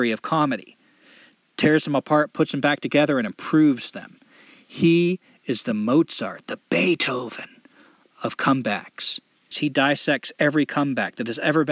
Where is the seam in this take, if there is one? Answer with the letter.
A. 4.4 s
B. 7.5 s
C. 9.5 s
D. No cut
C